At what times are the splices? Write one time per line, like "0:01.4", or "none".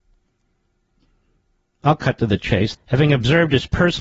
0:02.7